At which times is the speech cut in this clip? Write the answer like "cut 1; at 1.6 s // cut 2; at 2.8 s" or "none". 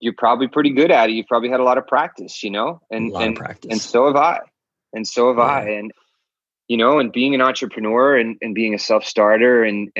none